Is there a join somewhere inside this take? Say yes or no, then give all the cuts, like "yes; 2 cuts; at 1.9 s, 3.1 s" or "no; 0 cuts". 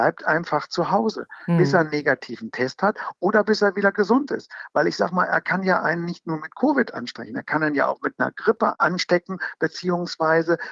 no; 0 cuts